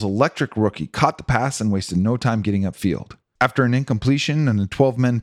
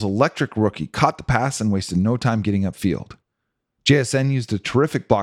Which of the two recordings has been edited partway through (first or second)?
first